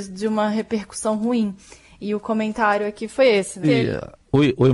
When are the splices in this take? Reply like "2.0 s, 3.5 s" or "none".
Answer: 3.6 s